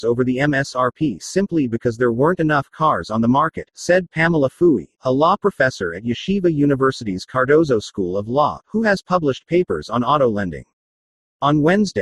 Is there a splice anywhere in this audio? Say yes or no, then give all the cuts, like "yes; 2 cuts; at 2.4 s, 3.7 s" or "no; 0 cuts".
no; 0 cuts